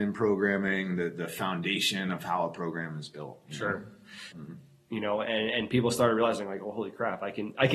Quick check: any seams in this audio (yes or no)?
yes